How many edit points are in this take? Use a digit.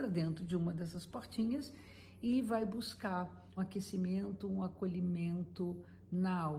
1